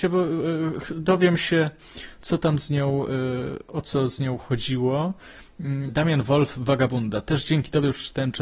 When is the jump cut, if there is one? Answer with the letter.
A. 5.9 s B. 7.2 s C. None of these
A